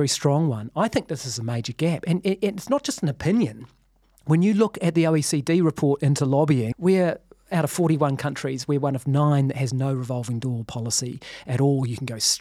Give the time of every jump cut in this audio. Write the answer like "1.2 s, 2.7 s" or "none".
6.7 s

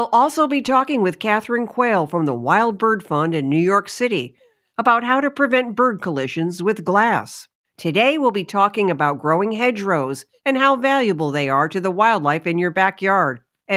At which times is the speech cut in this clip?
7.6 s

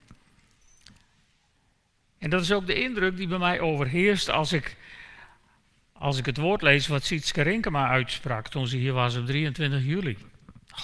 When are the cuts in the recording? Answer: none

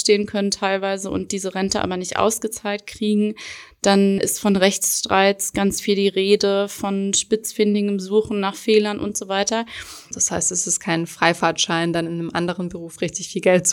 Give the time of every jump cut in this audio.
4.2 s, 10.1 s

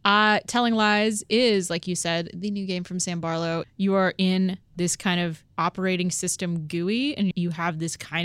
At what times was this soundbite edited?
3.6 s, 5.5 s, 7.3 s

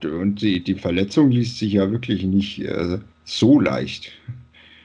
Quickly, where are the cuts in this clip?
3.1 s

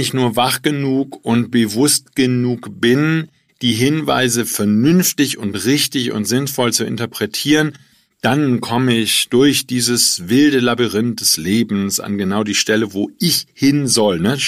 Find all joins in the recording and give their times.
none

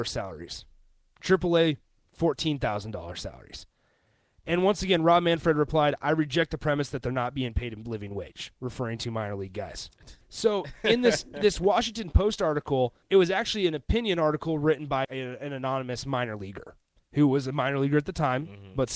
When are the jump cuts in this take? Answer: 10.2 s, 13.0 s, 15.0 s

